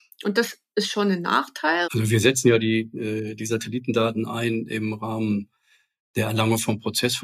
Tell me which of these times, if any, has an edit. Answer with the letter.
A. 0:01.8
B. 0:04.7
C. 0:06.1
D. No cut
A